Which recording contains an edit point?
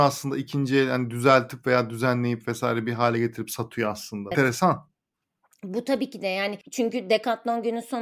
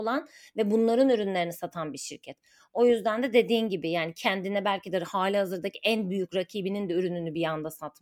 first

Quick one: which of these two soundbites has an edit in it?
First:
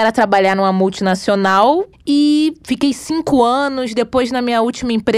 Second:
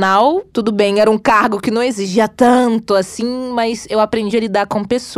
first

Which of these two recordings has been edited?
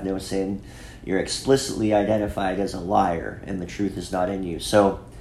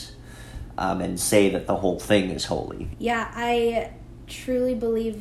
second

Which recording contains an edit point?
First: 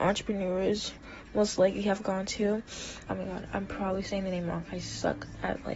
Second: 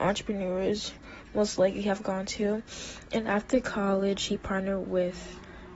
first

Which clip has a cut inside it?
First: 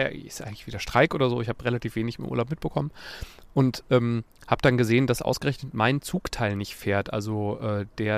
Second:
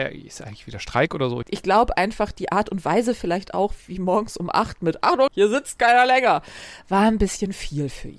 second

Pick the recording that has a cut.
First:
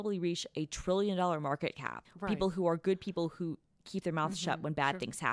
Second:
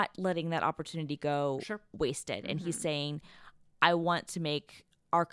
first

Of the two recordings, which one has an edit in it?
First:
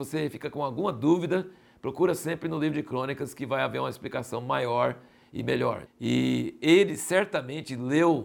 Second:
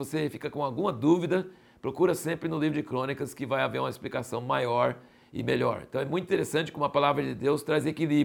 first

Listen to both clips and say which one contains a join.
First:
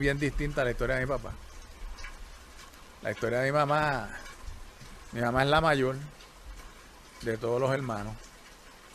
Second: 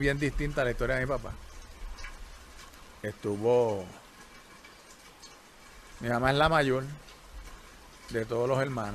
second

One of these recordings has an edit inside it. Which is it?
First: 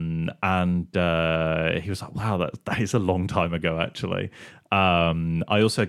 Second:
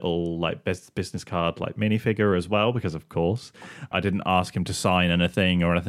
second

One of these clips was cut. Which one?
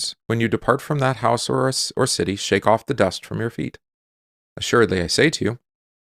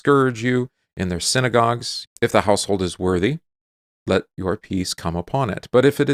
second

